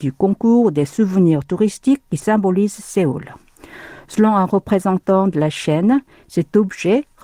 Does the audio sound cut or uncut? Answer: uncut